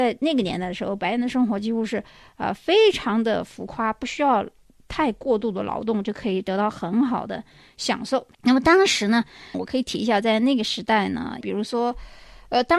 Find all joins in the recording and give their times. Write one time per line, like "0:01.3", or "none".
0:09.5
0:11.4